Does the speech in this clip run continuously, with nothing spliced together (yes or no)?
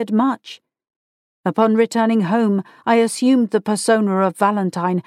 yes